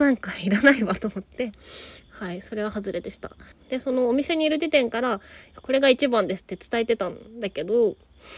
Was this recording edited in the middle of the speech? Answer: yes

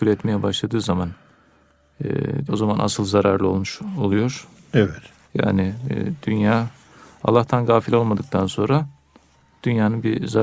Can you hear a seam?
yes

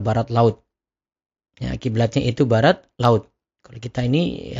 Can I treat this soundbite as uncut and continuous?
yes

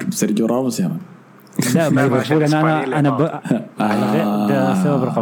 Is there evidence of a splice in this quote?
no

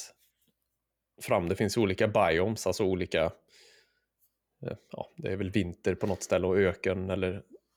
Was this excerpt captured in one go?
yes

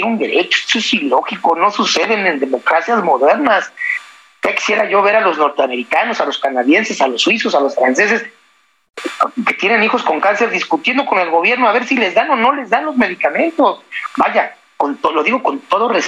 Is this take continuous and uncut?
yes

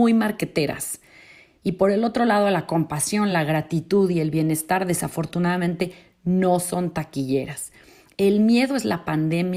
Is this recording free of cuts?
yes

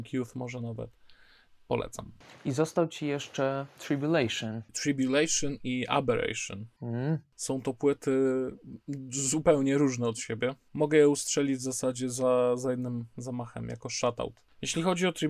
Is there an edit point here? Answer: no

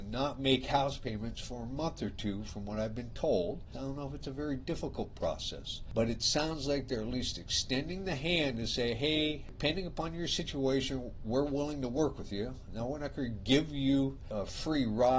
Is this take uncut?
no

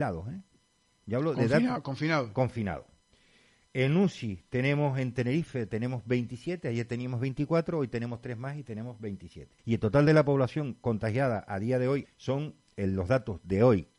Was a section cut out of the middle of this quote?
yes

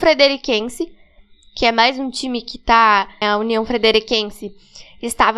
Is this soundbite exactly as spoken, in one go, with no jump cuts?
no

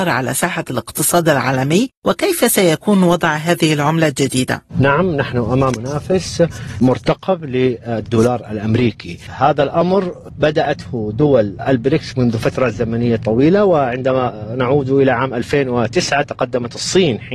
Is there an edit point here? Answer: no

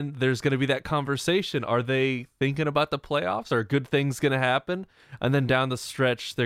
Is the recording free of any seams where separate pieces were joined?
yes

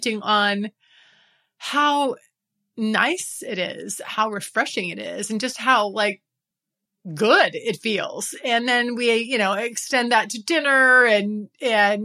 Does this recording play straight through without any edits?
yes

